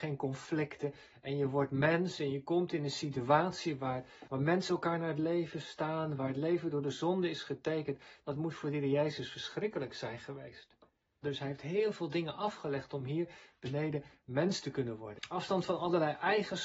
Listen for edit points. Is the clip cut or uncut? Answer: cut